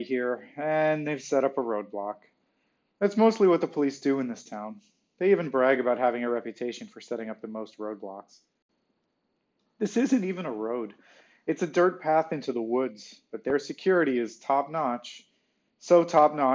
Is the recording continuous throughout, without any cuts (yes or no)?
yes